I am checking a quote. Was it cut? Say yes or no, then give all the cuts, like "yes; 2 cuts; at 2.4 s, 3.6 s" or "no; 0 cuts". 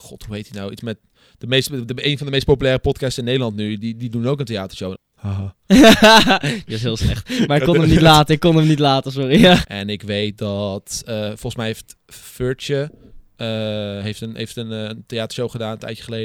yes; 2 cuts; at 4.9 s, 9.6 s